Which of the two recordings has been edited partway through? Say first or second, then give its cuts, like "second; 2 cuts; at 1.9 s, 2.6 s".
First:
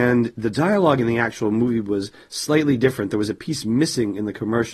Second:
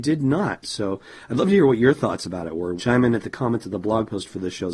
second; 1 cut; at 2.8 s